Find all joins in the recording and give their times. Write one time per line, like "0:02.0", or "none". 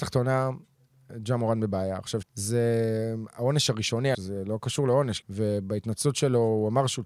0:02.2
0:04.1
0:05.2